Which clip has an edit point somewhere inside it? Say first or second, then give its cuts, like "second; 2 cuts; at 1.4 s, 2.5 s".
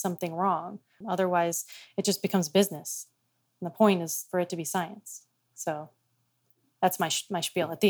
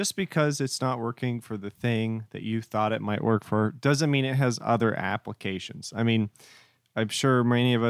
first; 1 cut; at 1.0 s